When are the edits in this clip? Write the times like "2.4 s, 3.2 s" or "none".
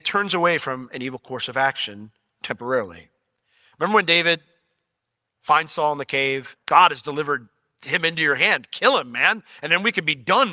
6.6 s